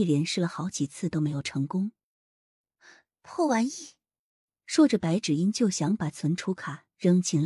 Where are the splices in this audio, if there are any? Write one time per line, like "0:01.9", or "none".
none